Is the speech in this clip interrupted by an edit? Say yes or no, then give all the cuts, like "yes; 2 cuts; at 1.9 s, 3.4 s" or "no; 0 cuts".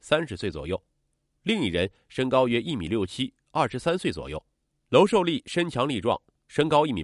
yes; 1 cut; at 4.7 s